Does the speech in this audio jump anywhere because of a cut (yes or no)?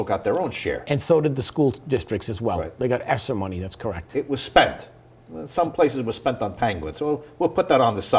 no